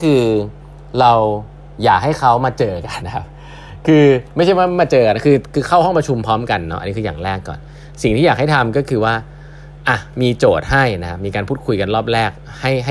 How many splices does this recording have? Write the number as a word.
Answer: one